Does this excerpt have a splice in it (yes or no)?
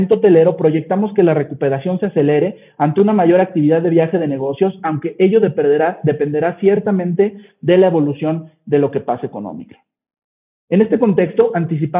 no